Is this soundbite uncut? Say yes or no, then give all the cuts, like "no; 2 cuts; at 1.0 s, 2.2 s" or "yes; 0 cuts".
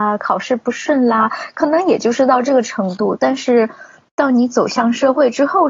yes; 0 cuts